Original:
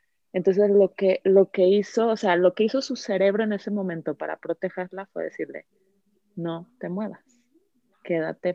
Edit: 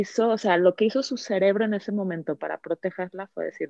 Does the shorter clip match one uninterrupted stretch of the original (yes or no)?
yes